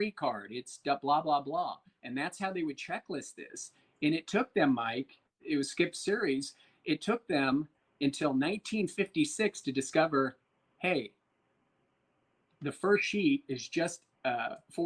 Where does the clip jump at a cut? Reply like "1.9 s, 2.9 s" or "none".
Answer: 5.3 s